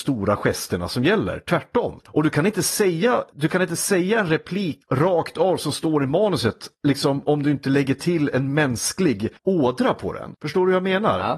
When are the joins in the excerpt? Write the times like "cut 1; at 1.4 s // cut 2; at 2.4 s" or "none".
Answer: cut 1; at 2.0 s